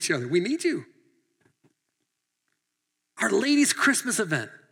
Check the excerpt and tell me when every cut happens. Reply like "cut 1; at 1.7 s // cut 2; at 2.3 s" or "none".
none